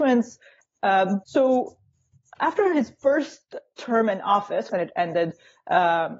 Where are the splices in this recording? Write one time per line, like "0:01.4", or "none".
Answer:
0:01.2
0:04.7